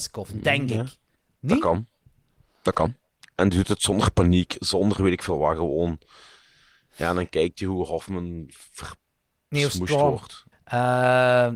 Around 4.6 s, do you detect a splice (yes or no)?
no